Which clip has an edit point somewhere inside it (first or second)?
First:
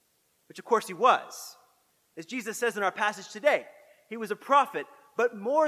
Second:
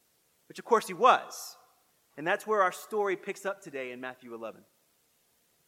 second